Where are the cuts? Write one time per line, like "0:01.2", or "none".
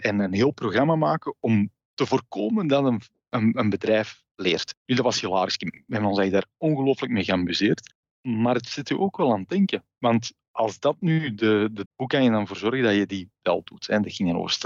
0:11.9